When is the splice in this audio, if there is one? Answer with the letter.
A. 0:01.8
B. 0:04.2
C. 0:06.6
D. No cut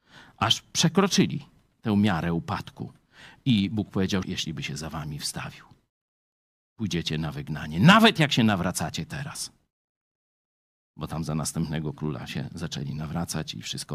B